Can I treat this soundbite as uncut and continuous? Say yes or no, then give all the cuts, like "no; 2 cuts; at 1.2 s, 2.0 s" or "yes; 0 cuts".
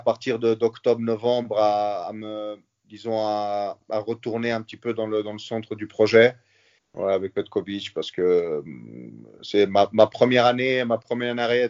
no; 1 cut; at 6.8 s